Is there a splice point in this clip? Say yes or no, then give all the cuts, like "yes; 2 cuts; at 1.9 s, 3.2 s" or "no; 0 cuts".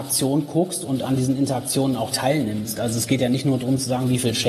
no; 0 cuts